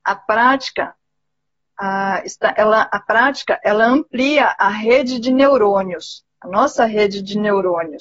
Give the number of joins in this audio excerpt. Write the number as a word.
one